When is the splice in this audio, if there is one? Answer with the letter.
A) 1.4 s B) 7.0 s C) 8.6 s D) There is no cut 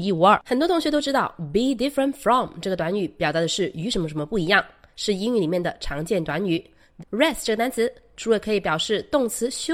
B